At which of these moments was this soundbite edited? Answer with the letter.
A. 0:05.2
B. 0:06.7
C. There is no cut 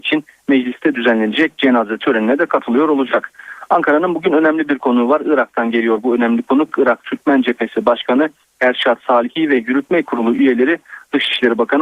C